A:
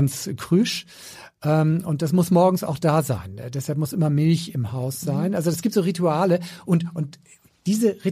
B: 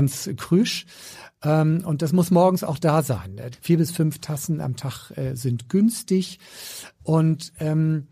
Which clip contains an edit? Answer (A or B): B